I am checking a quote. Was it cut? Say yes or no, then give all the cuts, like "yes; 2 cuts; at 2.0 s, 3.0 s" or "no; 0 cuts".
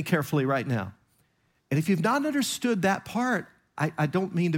yes; 1 cut; at 1.6 s